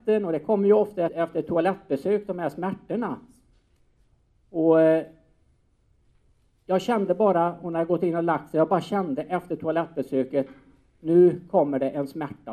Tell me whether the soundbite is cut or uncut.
cut